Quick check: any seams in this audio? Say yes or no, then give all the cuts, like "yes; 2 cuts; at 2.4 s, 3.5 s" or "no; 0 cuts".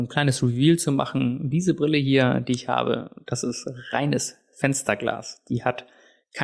no; 0 cuts